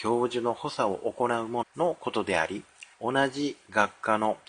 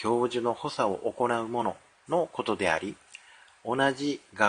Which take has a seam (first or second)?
first